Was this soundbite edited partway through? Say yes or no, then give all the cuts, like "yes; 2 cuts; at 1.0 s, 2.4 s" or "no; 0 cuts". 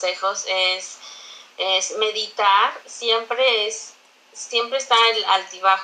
no; 0 cuts